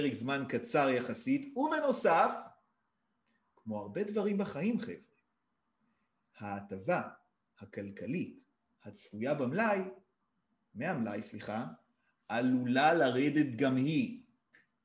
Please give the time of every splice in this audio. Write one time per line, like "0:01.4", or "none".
none